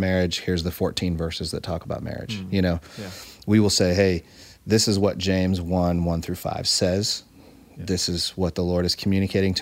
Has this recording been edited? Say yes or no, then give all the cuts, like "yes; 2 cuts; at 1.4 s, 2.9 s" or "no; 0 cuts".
no; 0 cuts